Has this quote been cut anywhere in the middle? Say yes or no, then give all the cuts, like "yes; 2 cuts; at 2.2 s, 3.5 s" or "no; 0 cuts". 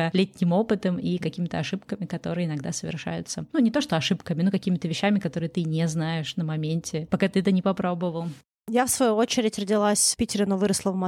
no; 0 cuts